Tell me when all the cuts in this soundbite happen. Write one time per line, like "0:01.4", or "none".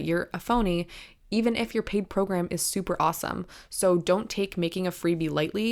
none